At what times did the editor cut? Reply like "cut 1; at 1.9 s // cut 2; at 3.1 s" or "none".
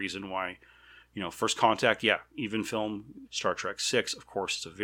cut 1; at 1.0 s // cut 2; at 3.3 s